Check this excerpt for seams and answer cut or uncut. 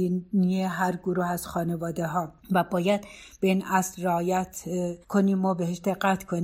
cut